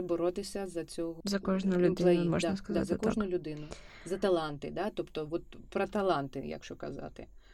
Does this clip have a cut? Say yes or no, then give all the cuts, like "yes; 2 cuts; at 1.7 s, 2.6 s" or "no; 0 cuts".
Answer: no; 0 cuts